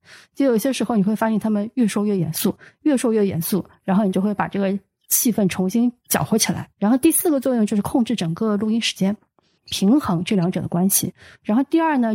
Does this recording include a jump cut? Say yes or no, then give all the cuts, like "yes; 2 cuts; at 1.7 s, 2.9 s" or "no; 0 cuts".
yes; 2 cuts; at 6.7 s, 9.6 s